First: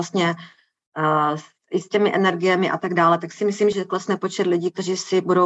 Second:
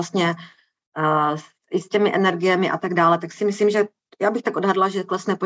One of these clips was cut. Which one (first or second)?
first